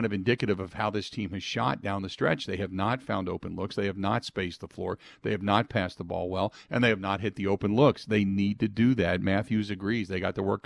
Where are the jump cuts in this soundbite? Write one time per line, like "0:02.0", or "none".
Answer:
none